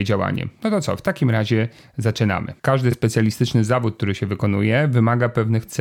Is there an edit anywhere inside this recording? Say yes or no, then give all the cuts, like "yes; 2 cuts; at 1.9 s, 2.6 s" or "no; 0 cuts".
yes; 1 cut; at 2.6 s